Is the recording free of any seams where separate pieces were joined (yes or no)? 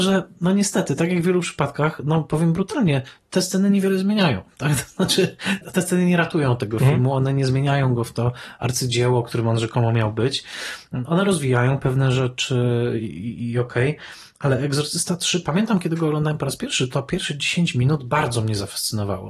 no